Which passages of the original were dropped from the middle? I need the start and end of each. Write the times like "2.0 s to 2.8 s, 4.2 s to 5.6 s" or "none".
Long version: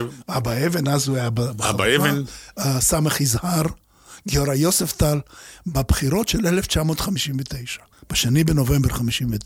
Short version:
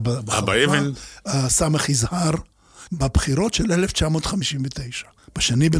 4.2 s to 5.6 s